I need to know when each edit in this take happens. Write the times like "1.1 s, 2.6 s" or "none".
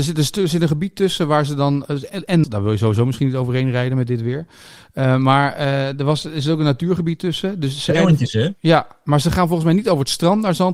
2.4 s